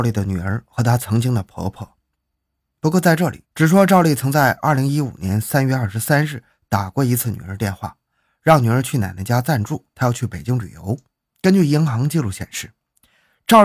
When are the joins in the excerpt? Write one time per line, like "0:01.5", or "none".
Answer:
0:03.4
0:11.3